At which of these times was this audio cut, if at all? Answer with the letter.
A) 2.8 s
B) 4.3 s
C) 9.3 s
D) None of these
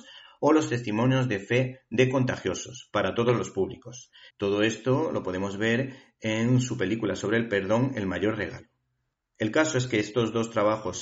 B